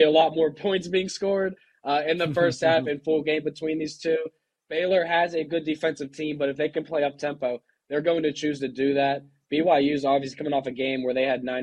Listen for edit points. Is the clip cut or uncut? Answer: uncut